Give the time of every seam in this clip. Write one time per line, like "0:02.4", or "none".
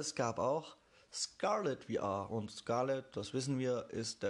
none